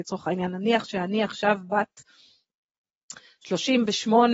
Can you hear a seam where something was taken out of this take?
no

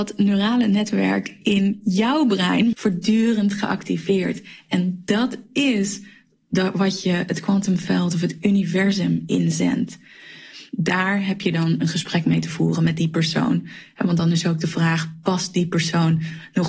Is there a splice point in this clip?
yes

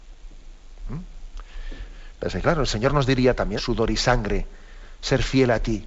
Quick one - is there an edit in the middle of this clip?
yes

